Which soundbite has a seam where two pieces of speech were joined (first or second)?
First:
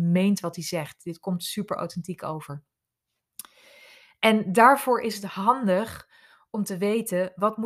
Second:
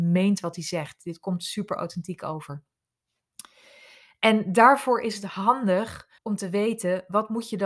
second